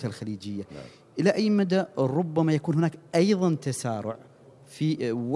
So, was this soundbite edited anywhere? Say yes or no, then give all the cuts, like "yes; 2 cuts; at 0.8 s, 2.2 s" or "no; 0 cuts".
no; 0 cuts